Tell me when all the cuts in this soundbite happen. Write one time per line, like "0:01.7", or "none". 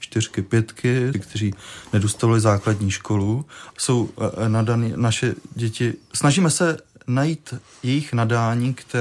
0:01.1
0:03.7